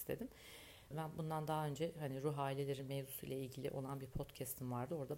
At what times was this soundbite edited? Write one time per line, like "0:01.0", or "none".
0:00.9